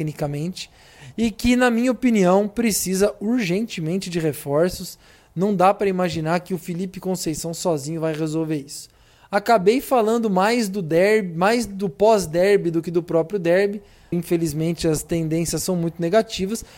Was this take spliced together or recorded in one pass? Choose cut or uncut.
cut